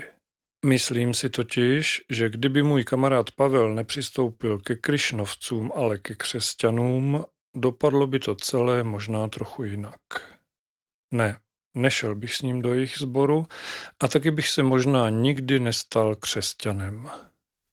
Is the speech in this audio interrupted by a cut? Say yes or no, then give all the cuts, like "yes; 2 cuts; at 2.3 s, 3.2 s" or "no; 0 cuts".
no; 0 cuts